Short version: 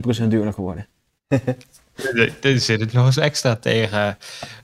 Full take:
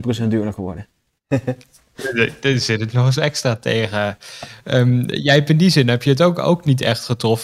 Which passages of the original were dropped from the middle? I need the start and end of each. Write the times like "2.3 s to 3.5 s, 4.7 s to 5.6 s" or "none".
none